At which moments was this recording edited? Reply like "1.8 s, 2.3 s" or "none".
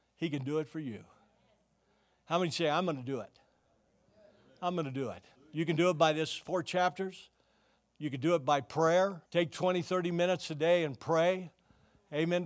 5.4 s, 9.3 s